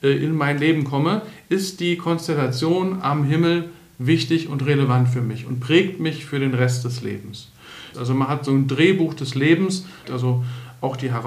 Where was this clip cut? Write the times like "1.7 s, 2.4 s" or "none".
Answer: 7.9 s, 10.0 s